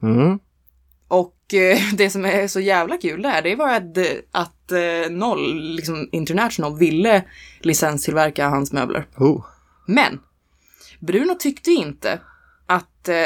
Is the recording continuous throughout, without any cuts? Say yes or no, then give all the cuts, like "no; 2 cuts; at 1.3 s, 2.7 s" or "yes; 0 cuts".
yes; 0 cuts